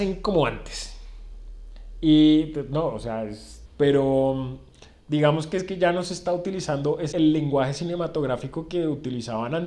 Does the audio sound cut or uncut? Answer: cut